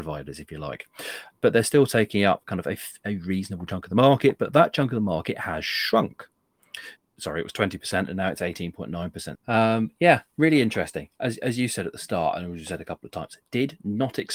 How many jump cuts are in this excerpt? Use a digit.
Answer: 2